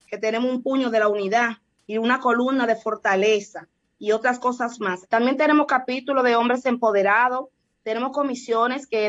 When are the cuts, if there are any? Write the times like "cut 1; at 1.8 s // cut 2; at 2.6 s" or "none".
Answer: cut 1; at 5.1 s